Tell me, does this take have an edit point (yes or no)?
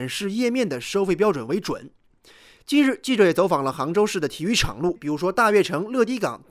yes